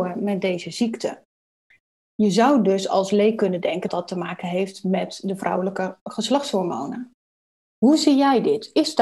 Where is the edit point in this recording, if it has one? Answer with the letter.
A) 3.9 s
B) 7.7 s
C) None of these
A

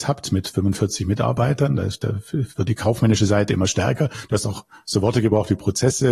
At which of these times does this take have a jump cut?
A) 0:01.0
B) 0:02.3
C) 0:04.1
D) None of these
D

